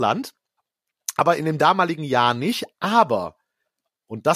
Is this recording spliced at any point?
no; 0 cuts

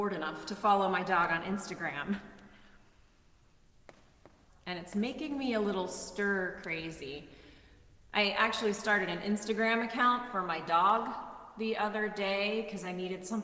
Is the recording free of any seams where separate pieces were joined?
no; 1 cut; at 4.5 s

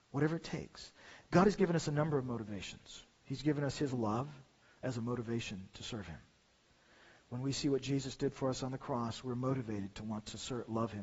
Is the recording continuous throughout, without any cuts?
yes; 0 cuts

